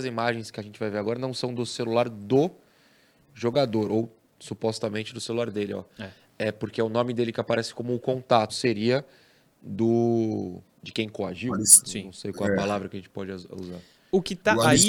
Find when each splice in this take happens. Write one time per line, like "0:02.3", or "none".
0:08.5